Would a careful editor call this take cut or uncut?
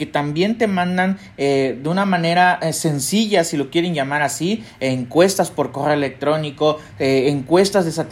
uncut